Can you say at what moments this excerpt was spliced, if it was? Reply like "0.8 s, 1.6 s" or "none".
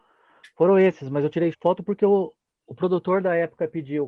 1.5 s